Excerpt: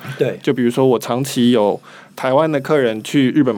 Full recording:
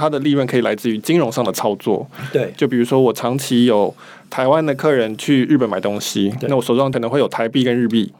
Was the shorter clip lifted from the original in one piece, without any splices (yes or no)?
yes